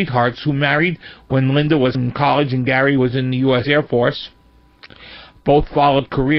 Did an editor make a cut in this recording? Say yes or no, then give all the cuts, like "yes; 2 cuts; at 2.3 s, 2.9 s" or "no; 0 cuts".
yes; 1 cut; at 1.9 s